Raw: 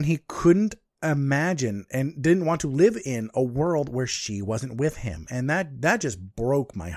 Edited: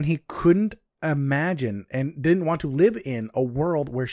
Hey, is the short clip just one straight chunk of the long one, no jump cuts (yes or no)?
yes